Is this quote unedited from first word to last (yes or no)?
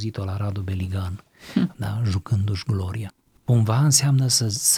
no